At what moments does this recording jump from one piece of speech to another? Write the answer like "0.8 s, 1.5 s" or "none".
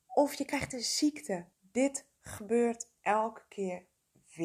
1.5 s